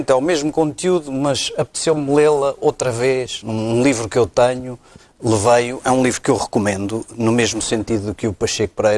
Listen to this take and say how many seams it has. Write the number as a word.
one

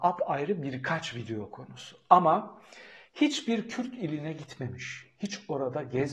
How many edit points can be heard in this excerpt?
zero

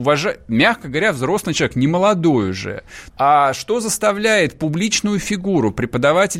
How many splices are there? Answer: one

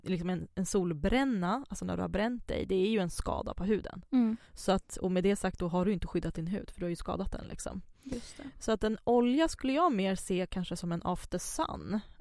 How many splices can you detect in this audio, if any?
one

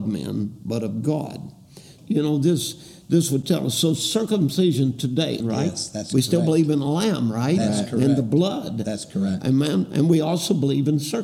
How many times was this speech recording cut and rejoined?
two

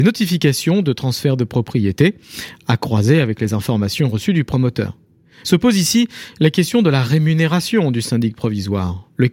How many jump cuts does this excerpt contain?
one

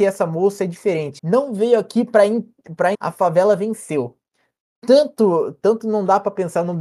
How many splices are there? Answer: two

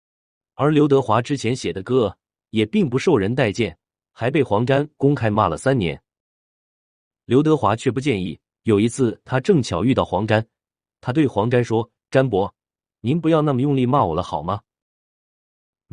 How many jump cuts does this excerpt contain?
zero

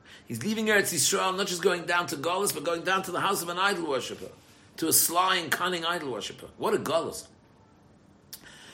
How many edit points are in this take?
zero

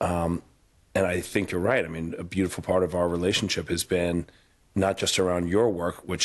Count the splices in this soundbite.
zero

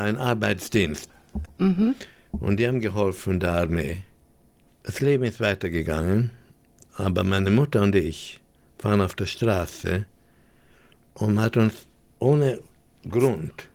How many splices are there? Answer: two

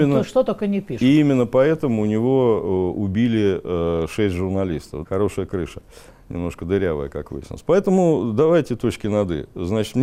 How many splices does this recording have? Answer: one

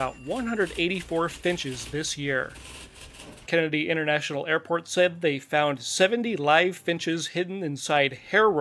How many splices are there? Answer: one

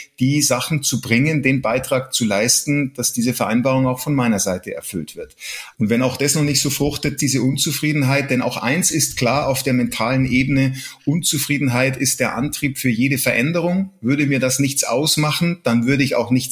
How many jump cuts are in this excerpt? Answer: two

